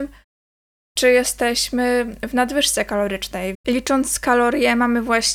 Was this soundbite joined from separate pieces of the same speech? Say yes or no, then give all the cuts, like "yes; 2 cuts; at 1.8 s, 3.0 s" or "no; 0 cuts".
yes; 1 cut; at 3.5 s